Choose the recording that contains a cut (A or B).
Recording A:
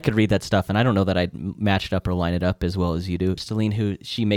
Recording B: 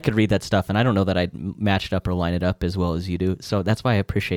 A